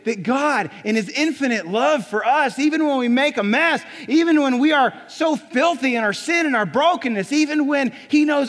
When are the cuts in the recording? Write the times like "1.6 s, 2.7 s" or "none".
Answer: none